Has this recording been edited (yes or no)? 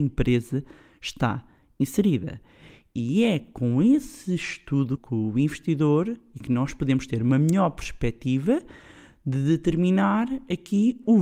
yes